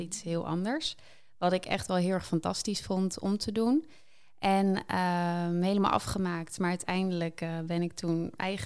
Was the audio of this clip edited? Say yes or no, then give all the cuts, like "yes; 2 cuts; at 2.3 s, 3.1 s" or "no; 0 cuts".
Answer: no; 0 cuts